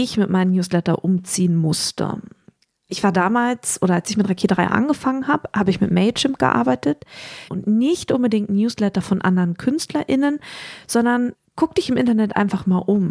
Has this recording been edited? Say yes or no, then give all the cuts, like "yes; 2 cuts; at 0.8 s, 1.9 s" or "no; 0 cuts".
yes; 1 cut; at 7.5 s